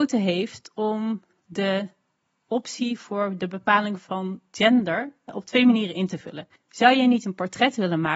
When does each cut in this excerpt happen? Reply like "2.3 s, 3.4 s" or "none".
6.6 s